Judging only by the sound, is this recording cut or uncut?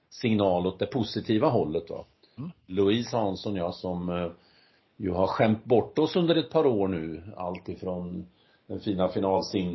cut